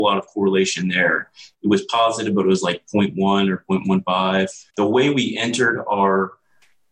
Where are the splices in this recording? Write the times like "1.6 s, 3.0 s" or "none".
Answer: 4.7 s